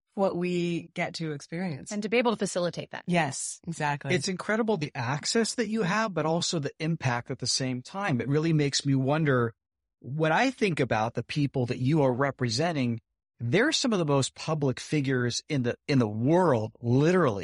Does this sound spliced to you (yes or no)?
no